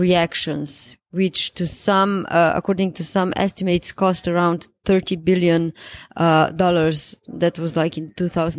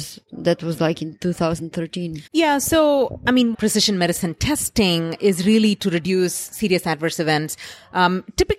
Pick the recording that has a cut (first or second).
second